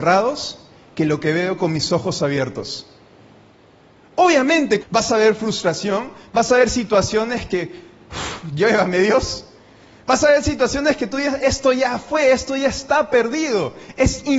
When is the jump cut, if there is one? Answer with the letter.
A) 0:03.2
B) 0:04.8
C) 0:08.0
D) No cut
B